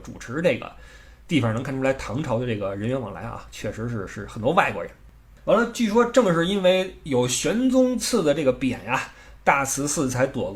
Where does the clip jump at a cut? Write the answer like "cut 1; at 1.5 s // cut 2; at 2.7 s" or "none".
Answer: none